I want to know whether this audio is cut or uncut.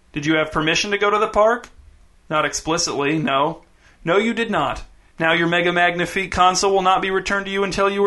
uncut